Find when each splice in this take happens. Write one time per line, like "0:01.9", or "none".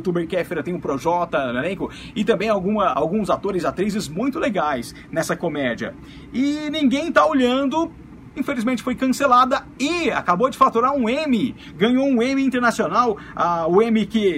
0:02.9